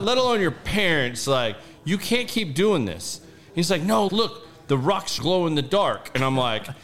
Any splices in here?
yes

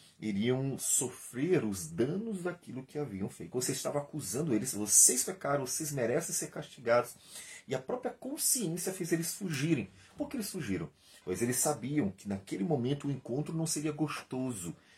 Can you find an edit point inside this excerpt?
yes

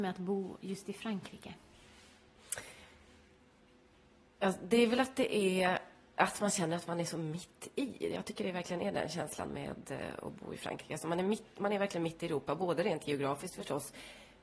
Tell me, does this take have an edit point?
no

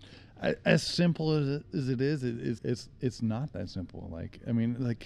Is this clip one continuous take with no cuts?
no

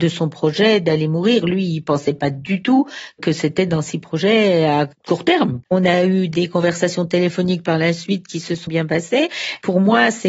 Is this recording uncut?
no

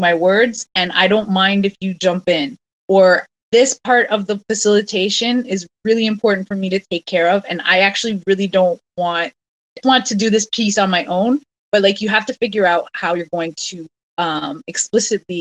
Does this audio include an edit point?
yes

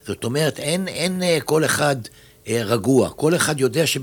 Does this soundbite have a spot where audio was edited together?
no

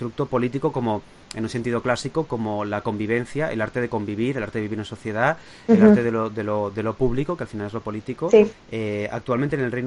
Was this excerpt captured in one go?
yes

